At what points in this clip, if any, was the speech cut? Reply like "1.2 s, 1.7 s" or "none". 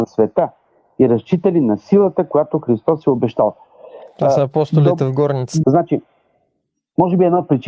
5.6 s